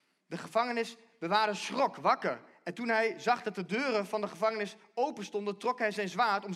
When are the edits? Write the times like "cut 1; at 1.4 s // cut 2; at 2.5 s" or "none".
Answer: none